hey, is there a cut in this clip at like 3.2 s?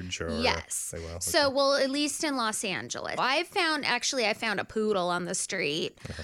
yes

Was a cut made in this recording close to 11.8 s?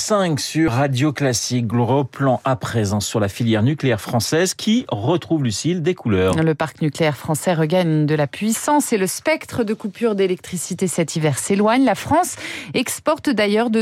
no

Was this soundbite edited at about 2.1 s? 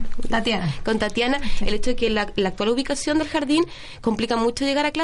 no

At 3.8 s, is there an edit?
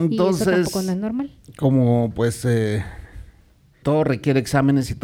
yes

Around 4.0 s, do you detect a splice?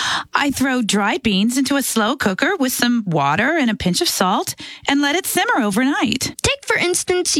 no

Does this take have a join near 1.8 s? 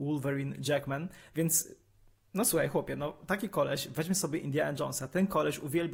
no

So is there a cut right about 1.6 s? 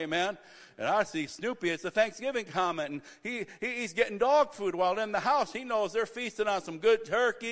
no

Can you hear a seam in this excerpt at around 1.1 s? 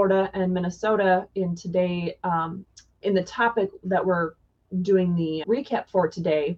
no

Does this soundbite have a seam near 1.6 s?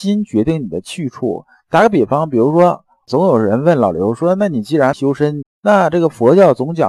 no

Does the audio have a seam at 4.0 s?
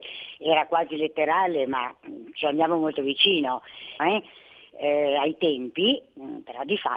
yes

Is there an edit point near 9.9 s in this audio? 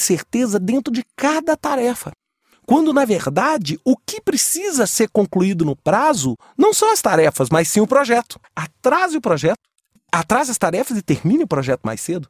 no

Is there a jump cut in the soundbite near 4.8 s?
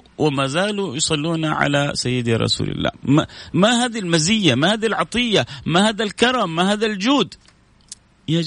no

